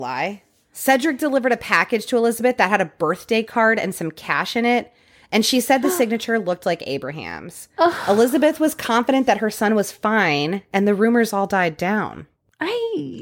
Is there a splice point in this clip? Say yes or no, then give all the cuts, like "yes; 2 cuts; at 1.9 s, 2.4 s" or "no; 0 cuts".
no; 0 cuts